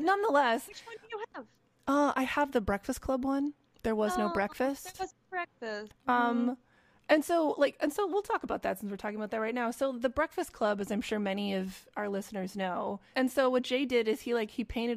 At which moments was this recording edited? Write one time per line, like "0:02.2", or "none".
0:05.9
0:13.1